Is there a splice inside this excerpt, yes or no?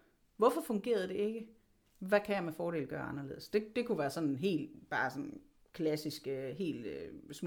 no